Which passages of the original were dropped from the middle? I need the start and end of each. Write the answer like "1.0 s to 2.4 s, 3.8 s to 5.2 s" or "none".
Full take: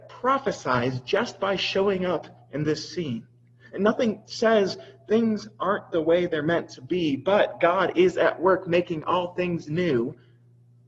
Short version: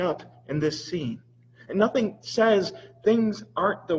none